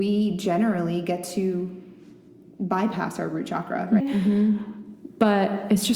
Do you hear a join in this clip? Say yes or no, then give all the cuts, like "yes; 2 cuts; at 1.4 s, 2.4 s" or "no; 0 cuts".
yes; 1 cut; at 4.0 s